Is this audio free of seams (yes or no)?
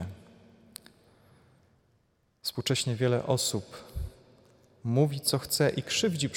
yes